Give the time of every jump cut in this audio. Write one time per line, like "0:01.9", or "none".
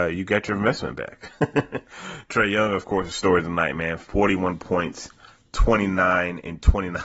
none